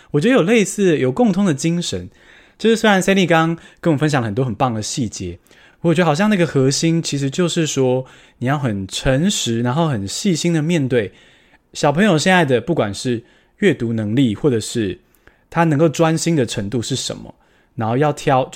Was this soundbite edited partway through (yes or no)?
no